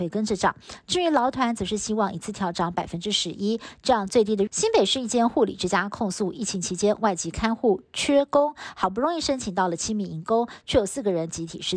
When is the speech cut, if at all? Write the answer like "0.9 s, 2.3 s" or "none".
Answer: 4.5 s